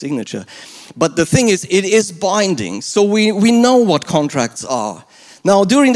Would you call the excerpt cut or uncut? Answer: uncut